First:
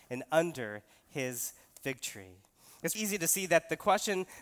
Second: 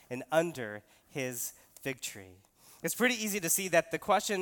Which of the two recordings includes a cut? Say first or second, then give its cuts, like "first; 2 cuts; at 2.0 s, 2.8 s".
first; 1 cut; at 2.9 s